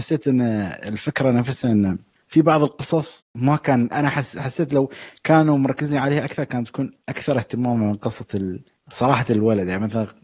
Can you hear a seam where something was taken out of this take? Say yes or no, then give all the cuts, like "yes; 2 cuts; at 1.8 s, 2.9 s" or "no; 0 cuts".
yes; 1 cut; at 3.9 s